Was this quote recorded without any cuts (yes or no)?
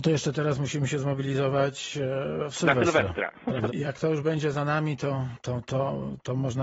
no